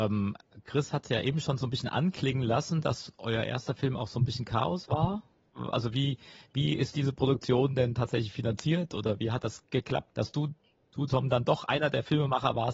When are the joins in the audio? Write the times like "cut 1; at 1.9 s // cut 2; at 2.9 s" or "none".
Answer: cut 1; at 5.7 s // cut 2; at 10.1 s